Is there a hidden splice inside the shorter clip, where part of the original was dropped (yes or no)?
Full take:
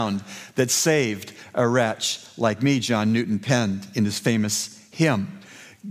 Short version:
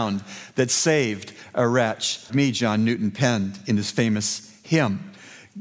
yes